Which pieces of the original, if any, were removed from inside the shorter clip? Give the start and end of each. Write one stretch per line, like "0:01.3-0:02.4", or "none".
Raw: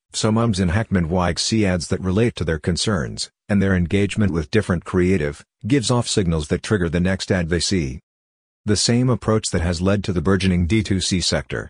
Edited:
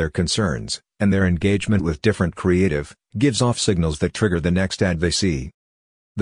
none